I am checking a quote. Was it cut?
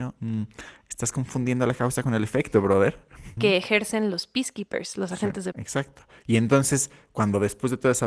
yes; 2 cuts; at 3.4 s, 5.5 s

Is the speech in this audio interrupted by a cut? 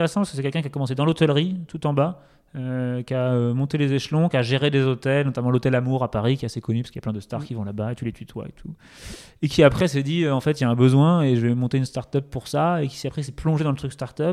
no; 0 cuts

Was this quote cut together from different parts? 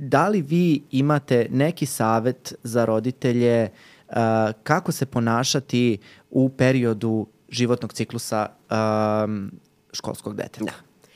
no; 0 cuts

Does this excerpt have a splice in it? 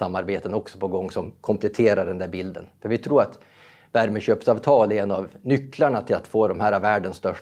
no; 0 cuts

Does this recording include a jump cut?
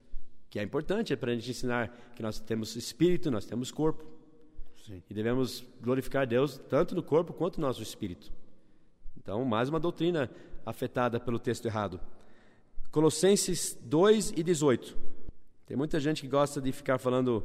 no; 0 cuts

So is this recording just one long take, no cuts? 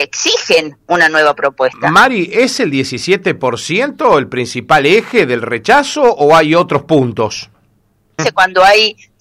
no; 1 cut; at 8.2 s

